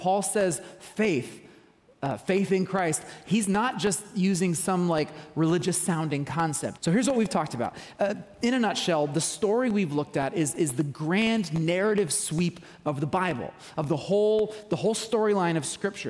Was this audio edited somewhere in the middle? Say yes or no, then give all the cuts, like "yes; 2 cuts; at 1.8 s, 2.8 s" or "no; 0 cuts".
yes; 1 cut; at 6.8 s